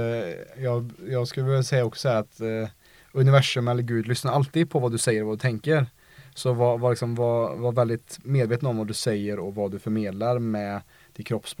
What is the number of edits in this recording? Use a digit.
0